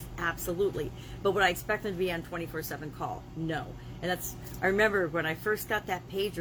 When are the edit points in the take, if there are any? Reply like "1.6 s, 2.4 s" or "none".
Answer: none